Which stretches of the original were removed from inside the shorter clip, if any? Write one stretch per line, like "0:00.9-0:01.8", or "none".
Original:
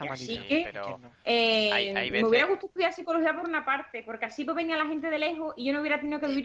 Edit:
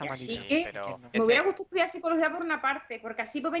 0:01.1-0:02.2